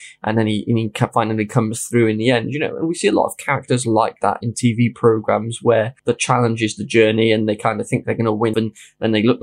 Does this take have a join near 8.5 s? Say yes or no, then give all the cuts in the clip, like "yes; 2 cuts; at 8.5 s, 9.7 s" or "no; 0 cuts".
yes; 2 cuts; at 6.0 s, 8.5 s